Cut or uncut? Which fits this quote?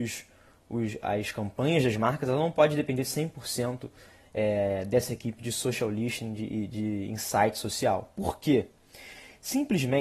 uncut